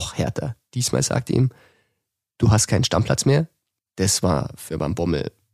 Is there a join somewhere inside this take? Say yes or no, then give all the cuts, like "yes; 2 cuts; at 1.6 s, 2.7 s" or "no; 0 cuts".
yes; 1 cut; at 3.8 s